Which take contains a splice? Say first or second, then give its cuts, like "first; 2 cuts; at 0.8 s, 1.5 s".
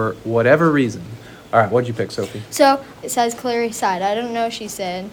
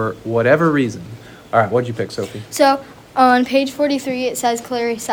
first; 1 cut; at 3.0 s